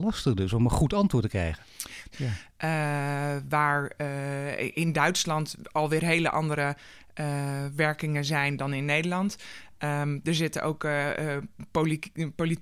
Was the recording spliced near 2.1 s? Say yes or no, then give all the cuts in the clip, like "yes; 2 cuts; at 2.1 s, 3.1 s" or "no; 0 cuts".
yes; 1 cut; at 2.1 s